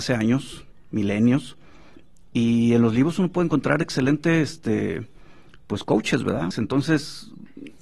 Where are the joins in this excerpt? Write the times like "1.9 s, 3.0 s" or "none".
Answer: 6.5 s

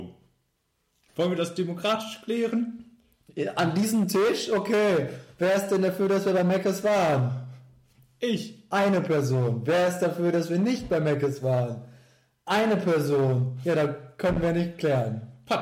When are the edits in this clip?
1.1 s

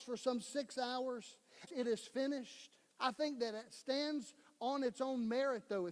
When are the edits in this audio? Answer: 1.7 s, 3.0 s

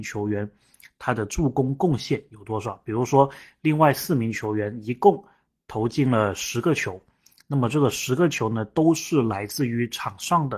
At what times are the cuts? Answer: none

